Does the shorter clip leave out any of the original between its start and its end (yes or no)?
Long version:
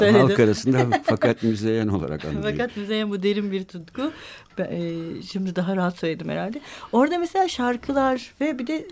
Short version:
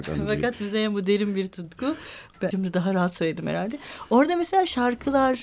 yes